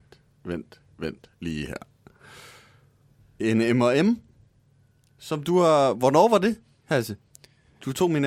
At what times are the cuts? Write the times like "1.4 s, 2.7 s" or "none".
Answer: none